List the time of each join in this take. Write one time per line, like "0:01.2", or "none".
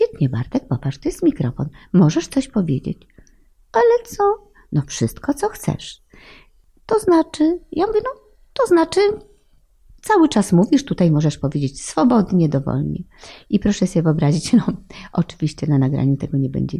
none